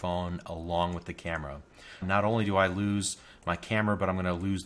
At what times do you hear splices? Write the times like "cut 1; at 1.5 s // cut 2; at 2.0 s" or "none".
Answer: cut 1; at 2.0 s